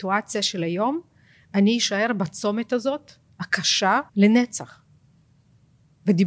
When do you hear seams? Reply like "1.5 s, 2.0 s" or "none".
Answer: 4.1 s

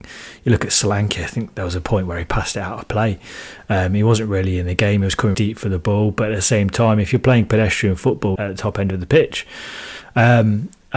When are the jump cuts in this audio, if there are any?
5.3 s, 8.4 s

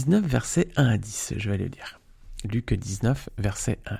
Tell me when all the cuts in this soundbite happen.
none

